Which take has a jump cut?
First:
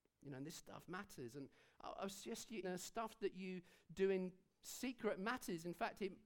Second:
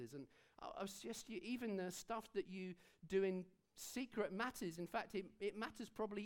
first; 1 cut; at 2.6 s

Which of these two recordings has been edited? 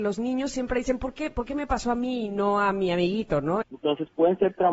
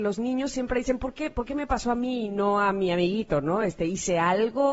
first; 1 cut; at 3.6 s

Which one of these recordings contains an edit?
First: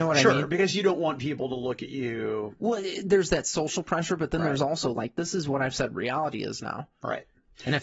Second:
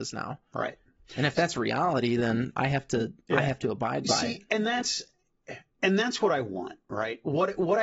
first; 1 cut; at 2.6 s

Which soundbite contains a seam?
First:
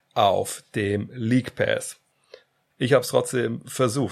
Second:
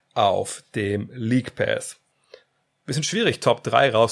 first; 1 cut; at 2.7 s

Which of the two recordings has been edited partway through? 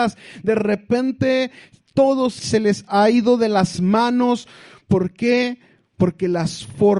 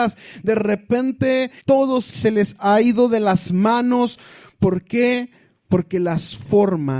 second; 1 cut; at 1.6 s

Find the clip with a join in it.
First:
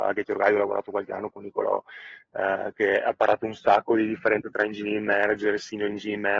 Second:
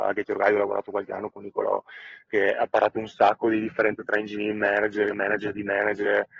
second; 2 cuts; at 2.3 s, 5.1 s

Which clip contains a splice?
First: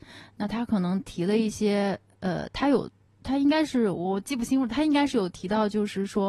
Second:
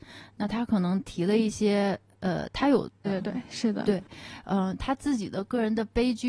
second; 2 cuts; at 3.0 s, 4.8 s

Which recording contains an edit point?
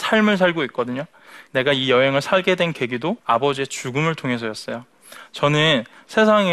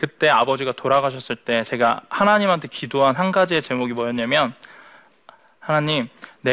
first; 2 cuts; at 1.5 s, 3.2 s

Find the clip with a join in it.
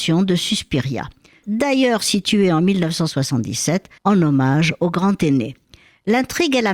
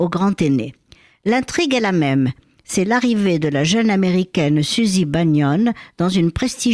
first; 2 cuts; at 1.4 s, 4.0 s

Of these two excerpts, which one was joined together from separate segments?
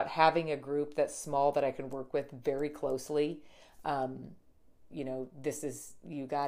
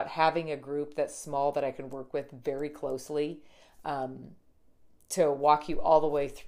first; 1 cut; at 4.9 s

